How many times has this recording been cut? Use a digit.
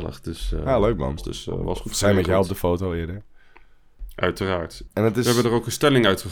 2